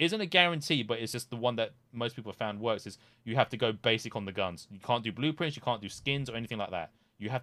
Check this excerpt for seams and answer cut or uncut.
uncut